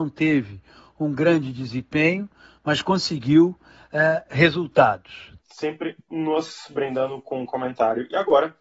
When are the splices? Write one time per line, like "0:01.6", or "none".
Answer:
0:05.4

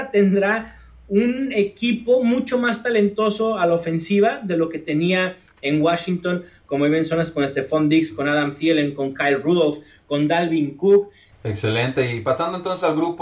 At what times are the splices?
0:11.3

